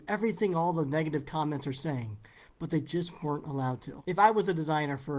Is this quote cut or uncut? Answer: uncut